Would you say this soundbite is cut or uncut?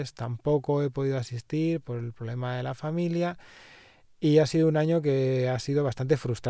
uncut